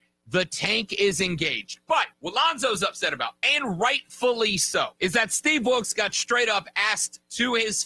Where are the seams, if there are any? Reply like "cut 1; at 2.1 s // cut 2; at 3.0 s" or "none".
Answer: cut 1; at 2.1 s // cut 2; at 5.0 s

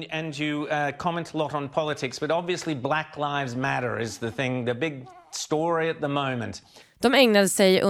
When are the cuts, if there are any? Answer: cut 1; at 6.8 s

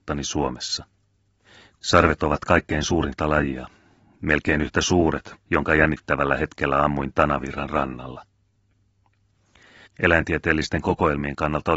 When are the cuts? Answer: cut 1; at 5.3 s // cut 2; at 9.9 s

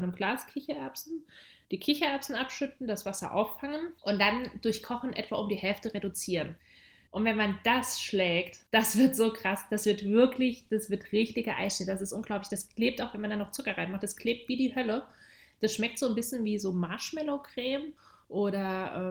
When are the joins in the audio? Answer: none

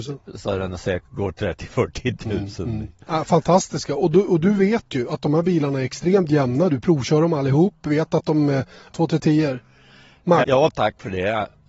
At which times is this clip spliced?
cut 1; at 8.9 s // cut 2; at 10.4 s

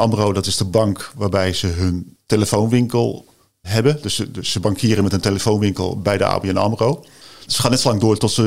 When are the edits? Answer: cut 1; at 3.6 s // cut 2; at 7.5 s

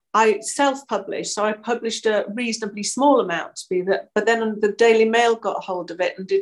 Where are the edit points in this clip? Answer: none

